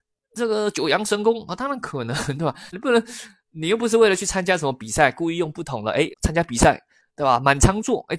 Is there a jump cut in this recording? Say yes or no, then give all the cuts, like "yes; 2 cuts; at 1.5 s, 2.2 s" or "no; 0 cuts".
yes; 2 cuts; at 2.7 s, 6.1 s